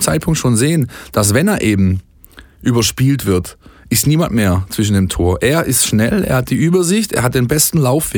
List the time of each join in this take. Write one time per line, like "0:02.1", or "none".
none